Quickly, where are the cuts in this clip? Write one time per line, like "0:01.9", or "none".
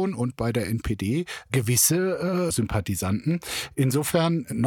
0:02.5